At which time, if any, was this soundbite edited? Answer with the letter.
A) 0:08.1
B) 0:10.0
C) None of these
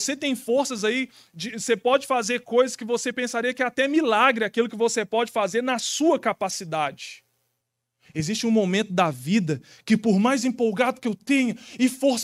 A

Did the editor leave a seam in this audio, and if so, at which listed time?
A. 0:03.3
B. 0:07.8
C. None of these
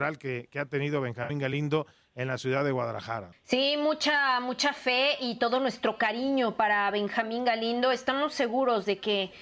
A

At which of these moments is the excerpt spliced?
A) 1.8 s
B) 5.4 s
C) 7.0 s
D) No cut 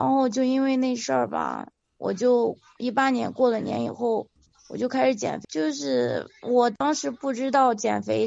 B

